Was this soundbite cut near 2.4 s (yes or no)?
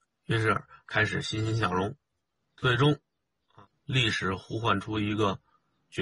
yes